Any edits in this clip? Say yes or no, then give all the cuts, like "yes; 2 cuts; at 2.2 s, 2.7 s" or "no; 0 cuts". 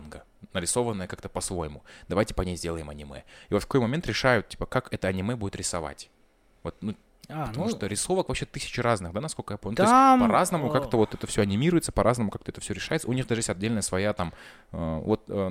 no; 0 cuts